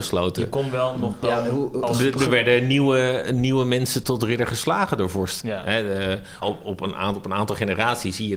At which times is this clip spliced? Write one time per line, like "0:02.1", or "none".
0:04.0
0:05.4
0:06.4